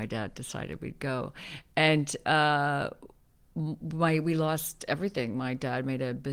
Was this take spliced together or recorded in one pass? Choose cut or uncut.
uncut